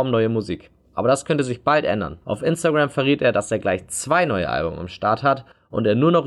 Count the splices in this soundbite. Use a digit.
1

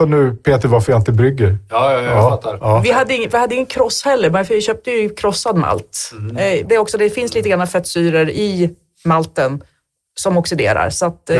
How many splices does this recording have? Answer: 1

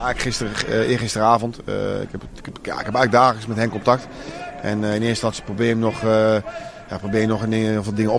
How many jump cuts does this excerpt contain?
0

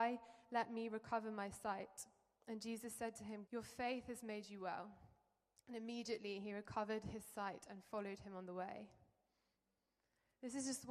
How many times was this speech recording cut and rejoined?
1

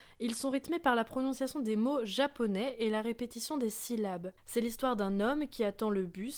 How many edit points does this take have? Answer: 1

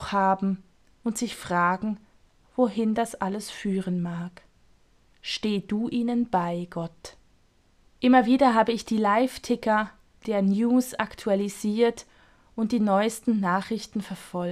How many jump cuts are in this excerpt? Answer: 1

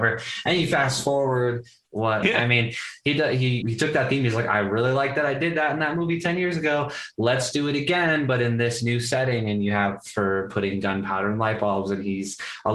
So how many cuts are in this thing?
2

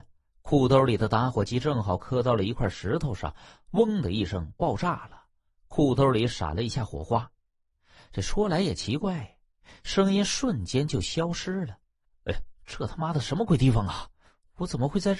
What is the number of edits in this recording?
1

